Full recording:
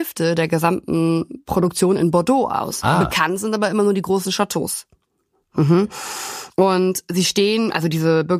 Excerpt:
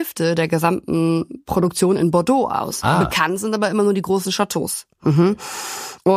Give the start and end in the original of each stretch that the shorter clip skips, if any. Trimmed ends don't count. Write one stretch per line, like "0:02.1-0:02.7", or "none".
0:04.9-0:05.4